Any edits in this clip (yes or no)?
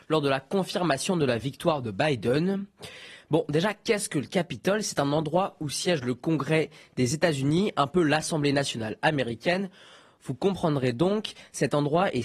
no